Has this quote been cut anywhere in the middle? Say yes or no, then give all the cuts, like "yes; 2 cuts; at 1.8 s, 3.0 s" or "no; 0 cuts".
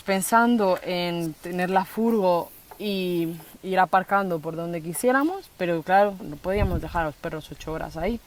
yes; 1 cut; at 6.2 s